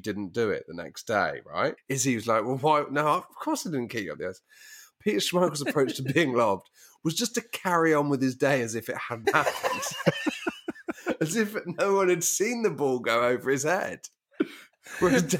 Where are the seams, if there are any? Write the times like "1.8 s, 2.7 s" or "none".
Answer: 1.8 s, 9.2 s